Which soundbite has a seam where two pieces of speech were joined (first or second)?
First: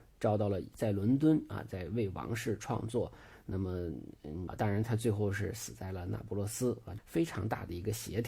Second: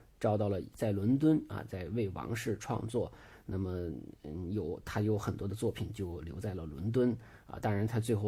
first